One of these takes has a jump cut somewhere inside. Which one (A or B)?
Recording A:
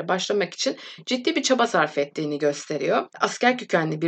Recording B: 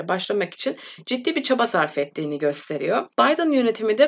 B